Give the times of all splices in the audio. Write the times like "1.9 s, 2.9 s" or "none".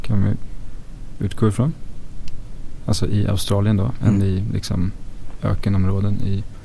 none